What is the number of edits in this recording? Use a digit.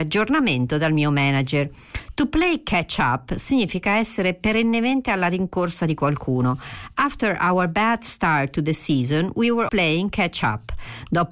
1